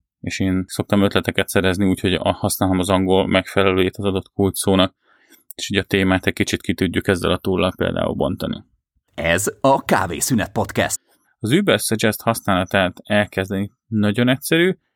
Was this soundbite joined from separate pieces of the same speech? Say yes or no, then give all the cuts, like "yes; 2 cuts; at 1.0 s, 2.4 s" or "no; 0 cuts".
yes; 2 cuts; at 9.0 s, 11.2 s